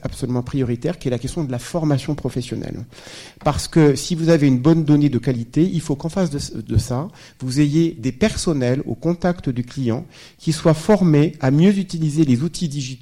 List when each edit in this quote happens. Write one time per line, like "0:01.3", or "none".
none